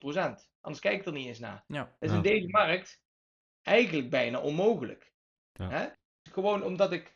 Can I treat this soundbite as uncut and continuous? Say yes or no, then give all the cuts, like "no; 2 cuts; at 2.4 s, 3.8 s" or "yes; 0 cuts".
no; 1 cut; at 6.3 s